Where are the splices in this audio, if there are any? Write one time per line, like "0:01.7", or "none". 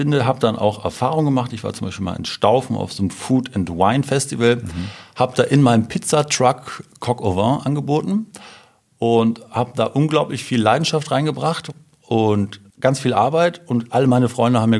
0:12.7